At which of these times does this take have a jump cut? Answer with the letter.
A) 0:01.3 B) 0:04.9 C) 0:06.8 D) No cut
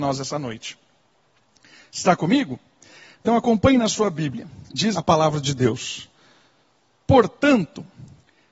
B